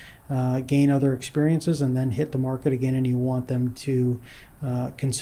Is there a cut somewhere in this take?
no; 0 cuts

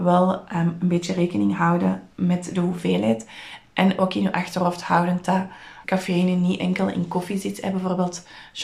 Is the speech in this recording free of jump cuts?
no; 1 cut; at 5.8 s

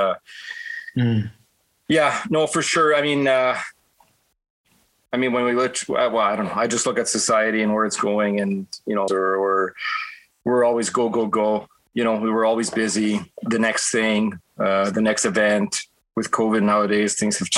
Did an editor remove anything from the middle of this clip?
yes; 1 cut; at 9.1 s

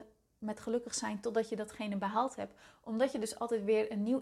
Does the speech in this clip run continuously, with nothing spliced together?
yes; 0 cuts

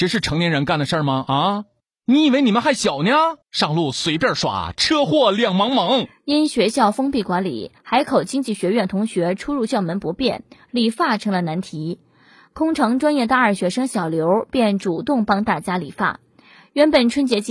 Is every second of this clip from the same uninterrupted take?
no; 1 cut; at 3.4 s

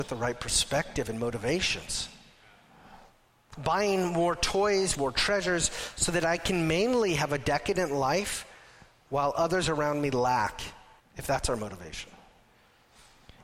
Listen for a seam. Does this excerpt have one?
yes; 2 cuts; at 4.9 s, 11.0 s

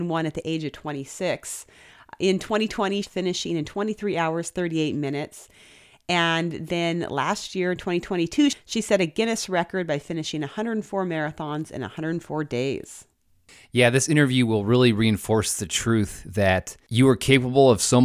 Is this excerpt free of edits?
no; 1 cut; at 3.0 s

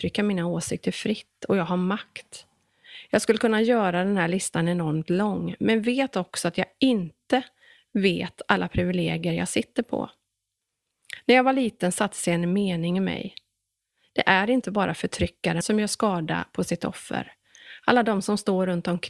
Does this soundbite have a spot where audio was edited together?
yes; 1 cut; at 15.6 s

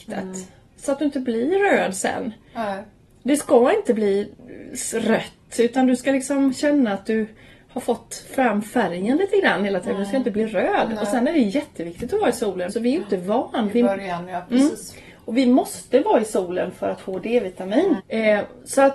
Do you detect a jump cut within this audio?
yes; 2 cuts; at 12.7 s, 18.0 s

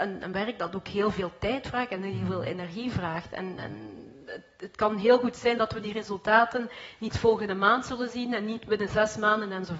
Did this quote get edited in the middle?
no; 0 cuts

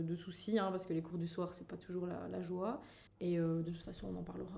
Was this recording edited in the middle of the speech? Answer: yes; 1 cut; at 3.1 s

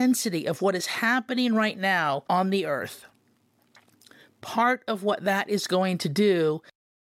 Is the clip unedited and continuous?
yes; 0 cuts

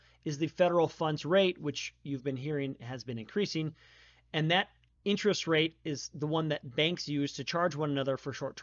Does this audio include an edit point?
no; 0 cuts

